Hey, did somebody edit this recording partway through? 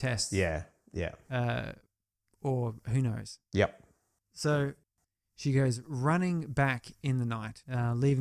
no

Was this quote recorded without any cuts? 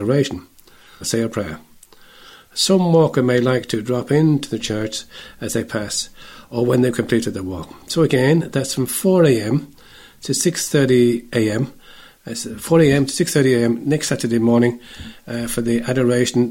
no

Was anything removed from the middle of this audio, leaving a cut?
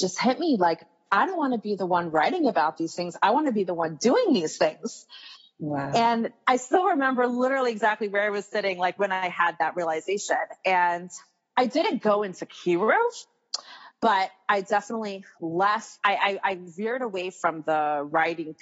yes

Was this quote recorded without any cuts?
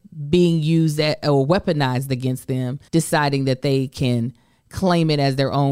no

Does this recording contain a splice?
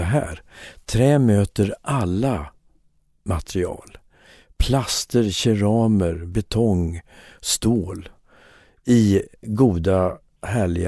no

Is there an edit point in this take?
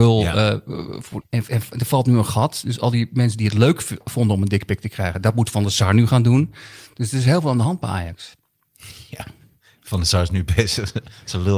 yes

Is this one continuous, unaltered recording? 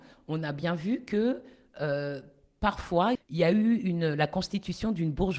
no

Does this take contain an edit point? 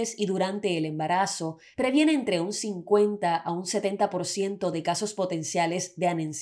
no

